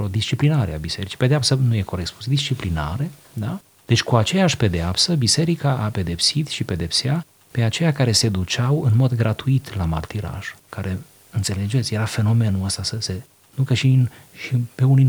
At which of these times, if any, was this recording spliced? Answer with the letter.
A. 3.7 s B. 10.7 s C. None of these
B